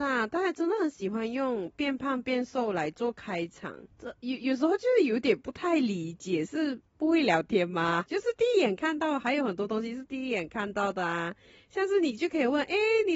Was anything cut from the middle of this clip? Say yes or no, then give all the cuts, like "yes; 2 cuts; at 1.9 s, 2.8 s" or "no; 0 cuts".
yes; 2 cuts; at 3.9 s, 8.1 s